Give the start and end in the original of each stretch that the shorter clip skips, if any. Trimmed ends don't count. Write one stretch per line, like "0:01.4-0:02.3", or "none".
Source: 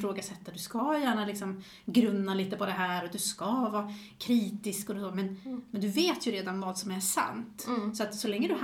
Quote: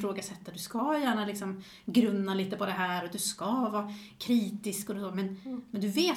none